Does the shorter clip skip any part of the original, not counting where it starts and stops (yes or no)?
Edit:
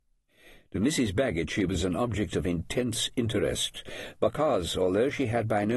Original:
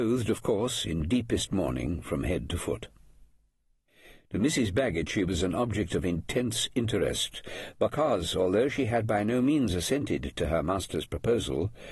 no